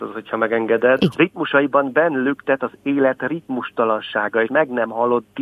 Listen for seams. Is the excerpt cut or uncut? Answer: cut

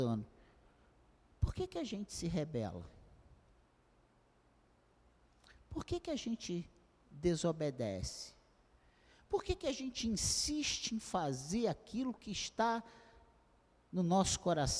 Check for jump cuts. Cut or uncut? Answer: uncut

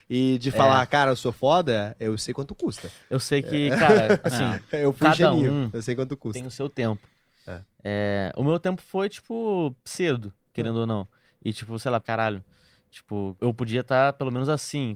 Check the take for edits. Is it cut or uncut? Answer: cut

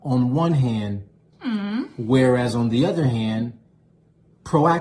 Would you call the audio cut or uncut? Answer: cut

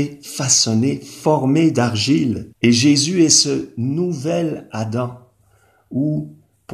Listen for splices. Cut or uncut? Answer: cut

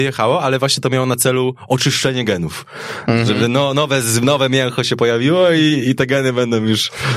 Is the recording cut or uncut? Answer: uncut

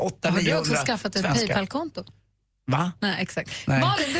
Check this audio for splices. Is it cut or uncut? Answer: uncut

